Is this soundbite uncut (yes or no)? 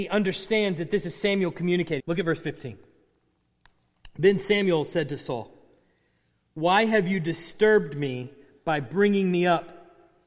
no